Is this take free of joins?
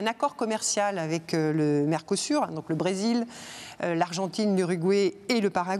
yes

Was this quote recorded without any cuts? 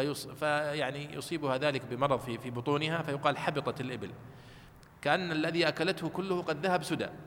yes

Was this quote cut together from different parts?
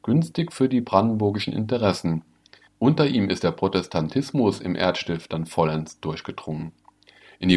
yes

